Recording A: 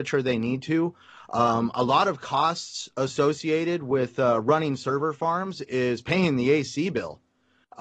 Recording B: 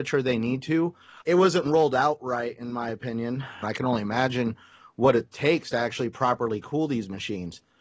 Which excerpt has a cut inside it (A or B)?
B